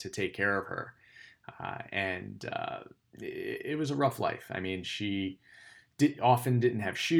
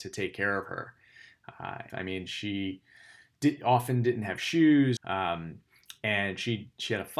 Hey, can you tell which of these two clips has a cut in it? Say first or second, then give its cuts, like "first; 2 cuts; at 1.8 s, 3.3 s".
second; 2 cuts; at 1.9 s, 5.0 s